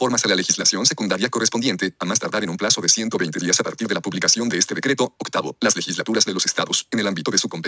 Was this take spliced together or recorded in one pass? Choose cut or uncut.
uncut